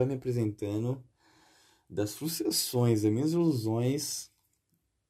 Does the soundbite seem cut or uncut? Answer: uncut